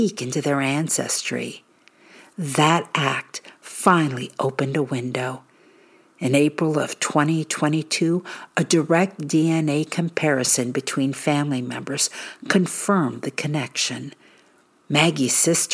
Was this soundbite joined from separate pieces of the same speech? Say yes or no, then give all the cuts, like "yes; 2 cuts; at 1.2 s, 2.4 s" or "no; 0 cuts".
yes; 1 cut; at 14.8 s